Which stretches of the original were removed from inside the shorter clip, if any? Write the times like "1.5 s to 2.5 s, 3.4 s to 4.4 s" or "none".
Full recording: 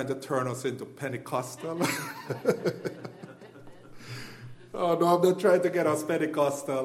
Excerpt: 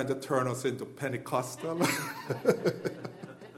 none

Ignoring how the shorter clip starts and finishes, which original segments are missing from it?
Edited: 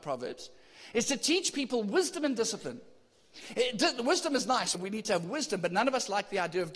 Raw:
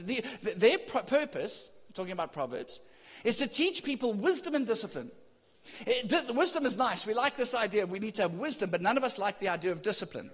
7.0 s to 7.8 s

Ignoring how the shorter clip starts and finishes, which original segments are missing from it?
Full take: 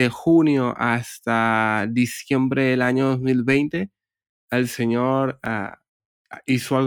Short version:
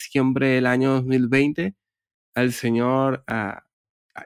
none

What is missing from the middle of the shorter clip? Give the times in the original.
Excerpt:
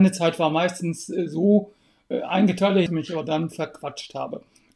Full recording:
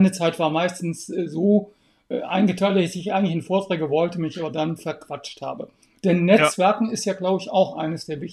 2.9 s to 4.1 s

